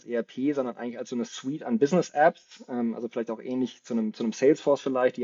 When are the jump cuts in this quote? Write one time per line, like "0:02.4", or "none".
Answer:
none